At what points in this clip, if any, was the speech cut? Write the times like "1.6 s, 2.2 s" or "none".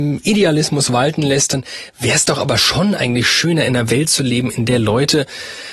none